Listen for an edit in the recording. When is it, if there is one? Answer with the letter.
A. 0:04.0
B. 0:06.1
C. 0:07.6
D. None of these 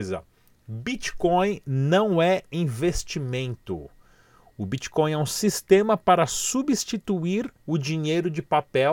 C